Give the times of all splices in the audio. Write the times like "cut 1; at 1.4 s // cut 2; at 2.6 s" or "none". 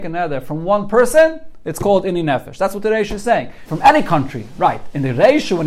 cut 1; at 3.6 s